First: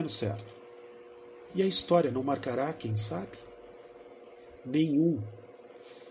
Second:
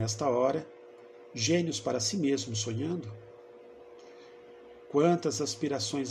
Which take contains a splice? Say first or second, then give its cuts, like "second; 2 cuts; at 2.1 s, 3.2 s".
first; 1 cut; at 1.5 s